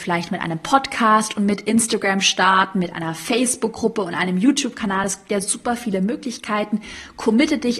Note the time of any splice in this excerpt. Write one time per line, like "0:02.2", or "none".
none